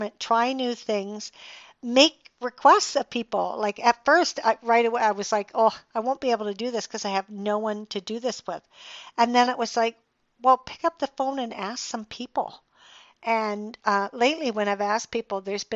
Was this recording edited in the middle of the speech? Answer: no; 0 cuts

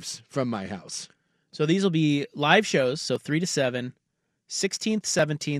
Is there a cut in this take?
no; 0 cuts

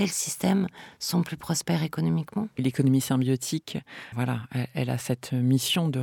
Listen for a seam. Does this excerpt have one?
yes; 2 cuts; at 2.6 s, 4.1 s

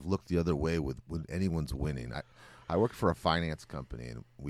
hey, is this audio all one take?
yes; 0 cuts

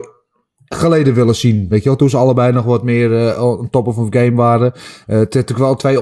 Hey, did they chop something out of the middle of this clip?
no; 0 cuts

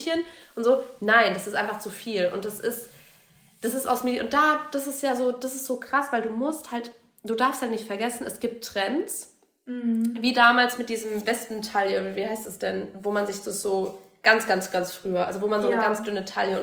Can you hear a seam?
no; 0 cuts

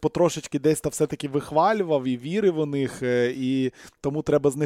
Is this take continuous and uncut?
yes; 0 cuts

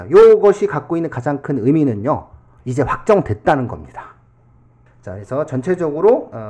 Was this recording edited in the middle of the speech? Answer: yes; 1 cut; at 4.9 s

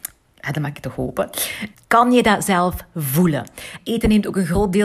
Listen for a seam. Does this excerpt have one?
yes; 2 cuts; at 1.7 s, 3.8 s

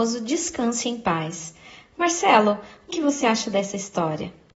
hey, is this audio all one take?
no; 1 cut; at 2.9 s

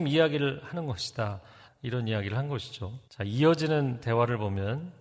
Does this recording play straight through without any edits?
no; 2 cuts; at 1.7 s, 3.1 s

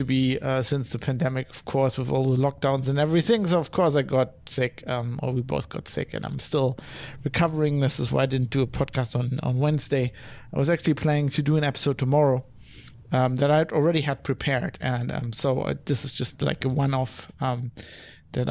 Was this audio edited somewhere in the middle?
no; 0 cuts

